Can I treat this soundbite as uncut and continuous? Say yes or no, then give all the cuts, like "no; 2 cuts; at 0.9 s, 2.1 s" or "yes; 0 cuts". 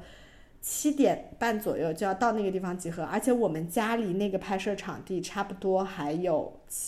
yes; 0 cuts